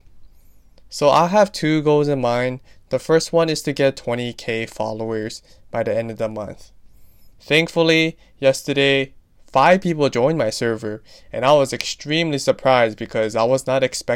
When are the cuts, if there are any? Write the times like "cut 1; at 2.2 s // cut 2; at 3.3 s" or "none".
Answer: cut 1; at 7.3 s

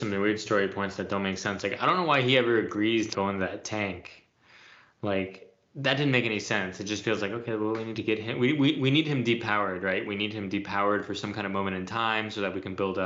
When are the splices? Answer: cut 1; at 3.1 s

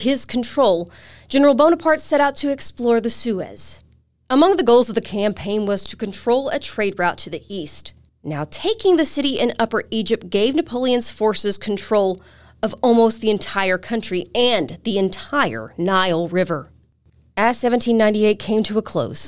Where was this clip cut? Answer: cut 1; at 8.1 s

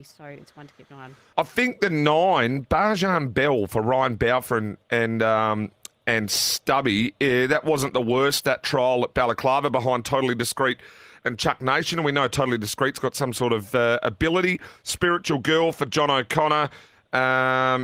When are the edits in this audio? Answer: cut 1; at 1.3 s

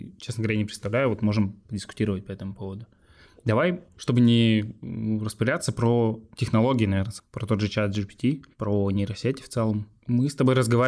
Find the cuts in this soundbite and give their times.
none

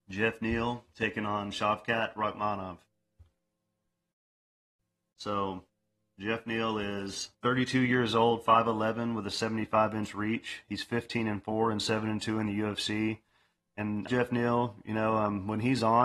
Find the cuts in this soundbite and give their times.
cut 1; at 7.3 s // cut 2; at 14.1 s

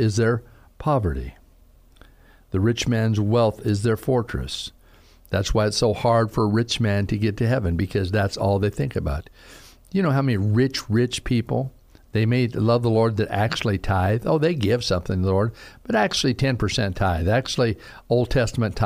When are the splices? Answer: none

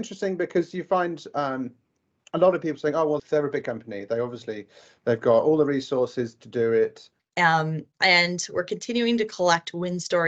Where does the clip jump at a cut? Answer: cut 1; at 3.2 s // cut 2; at 7.2 s

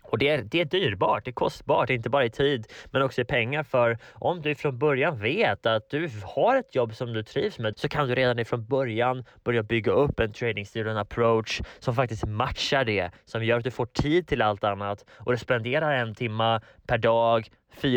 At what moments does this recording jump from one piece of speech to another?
cut 1; at 7.7 s

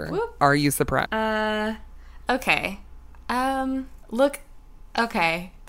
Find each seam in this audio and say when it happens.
cut 1; at 1.1 s

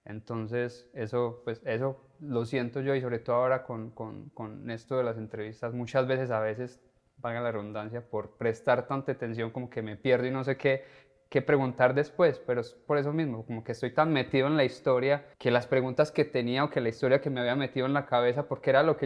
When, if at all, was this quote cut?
cut 1; at 15.3 s

